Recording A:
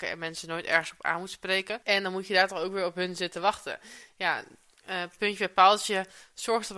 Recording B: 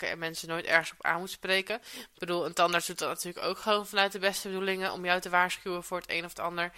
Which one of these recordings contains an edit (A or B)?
A